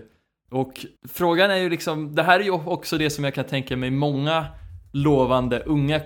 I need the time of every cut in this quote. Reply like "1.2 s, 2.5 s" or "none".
1.0 s